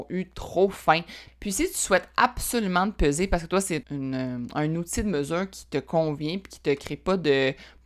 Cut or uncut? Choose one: cut